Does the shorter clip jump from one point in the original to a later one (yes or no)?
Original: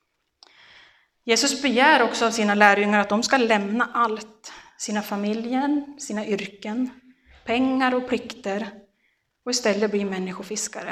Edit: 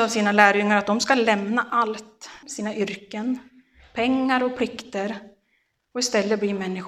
yes